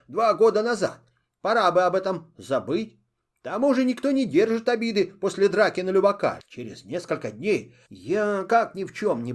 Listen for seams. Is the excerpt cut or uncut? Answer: cut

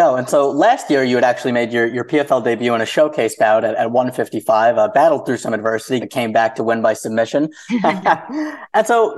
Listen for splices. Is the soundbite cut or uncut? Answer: cut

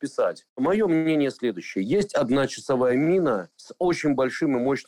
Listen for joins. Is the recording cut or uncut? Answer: uncut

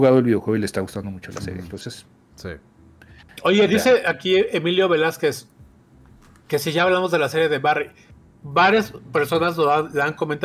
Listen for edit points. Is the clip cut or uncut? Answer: uncut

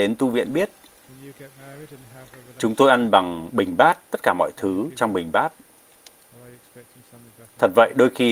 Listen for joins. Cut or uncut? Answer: uncut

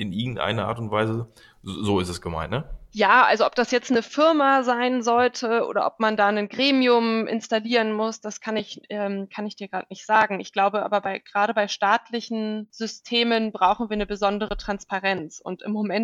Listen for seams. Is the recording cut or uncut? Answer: uncut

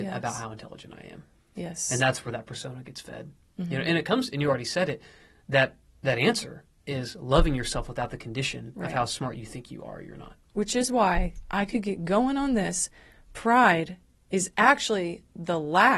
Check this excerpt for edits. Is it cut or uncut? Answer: uncut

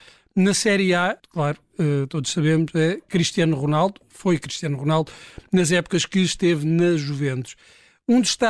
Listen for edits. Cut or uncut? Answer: cut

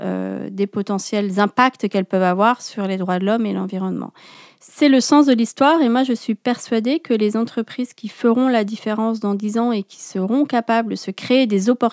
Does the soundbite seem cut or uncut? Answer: uncut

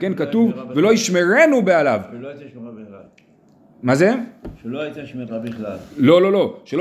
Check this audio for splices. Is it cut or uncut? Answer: uncut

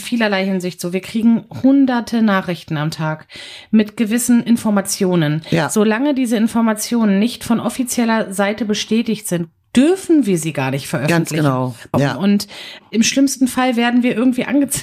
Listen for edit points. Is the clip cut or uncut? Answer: cut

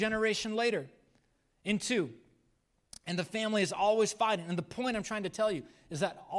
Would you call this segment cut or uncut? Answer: uncut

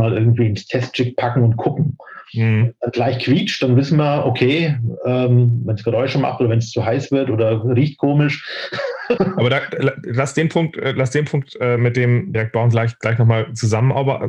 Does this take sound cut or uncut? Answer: cut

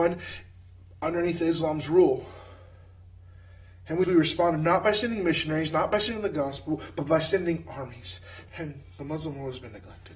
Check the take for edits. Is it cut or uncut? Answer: cut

